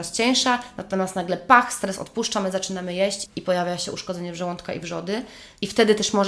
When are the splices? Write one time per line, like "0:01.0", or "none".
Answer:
0:03.3